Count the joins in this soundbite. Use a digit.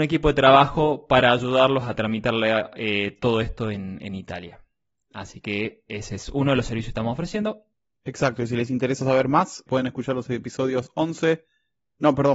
1